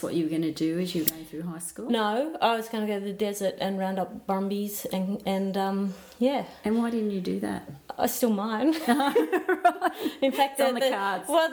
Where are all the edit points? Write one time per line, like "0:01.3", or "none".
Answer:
none

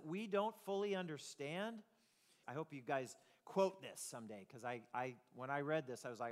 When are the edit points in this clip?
0:02.4

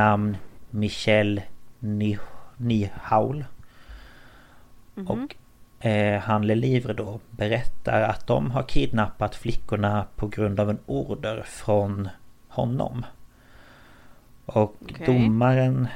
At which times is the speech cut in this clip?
none

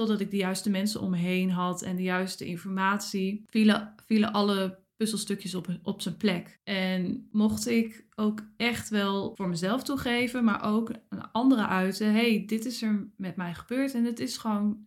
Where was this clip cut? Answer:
none

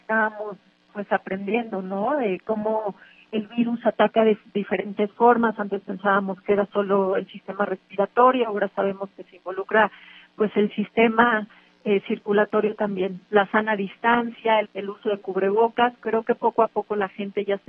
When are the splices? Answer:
0:13.3
0:14.6
0:16.0

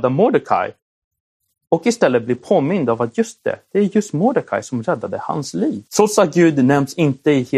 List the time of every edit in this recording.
0:05.9

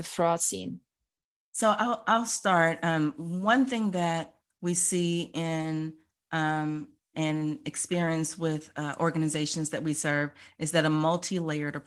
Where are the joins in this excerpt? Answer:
0:07.1

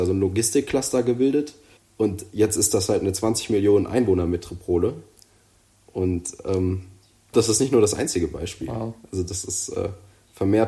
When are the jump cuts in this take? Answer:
0:01.8
0:07.3

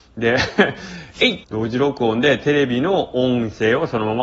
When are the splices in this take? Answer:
0:01.4

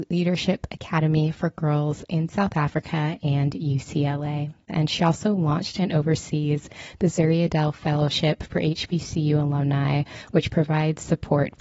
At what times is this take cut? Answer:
0:04.7

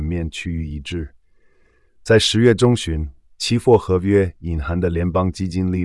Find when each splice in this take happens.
none

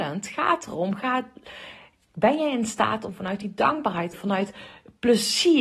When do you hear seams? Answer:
0:04.1

